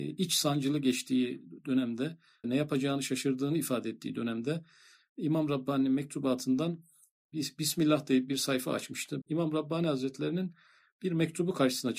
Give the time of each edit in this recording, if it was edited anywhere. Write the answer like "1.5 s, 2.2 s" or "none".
2.4 s, 9.2 s